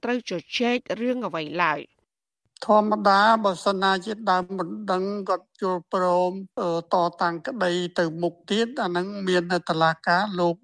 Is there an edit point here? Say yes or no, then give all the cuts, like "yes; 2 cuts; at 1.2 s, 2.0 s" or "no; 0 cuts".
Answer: no; 0 cuts